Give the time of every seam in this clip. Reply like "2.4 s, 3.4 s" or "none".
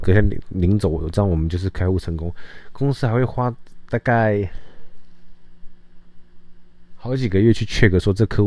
none